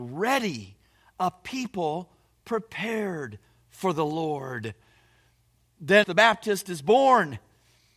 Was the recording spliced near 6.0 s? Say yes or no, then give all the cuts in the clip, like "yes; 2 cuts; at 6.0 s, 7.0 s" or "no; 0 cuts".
yes; 1 cut; at 6.0 s